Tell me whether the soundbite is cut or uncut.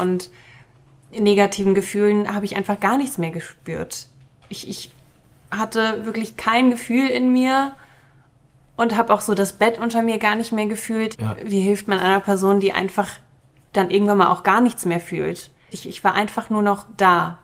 cut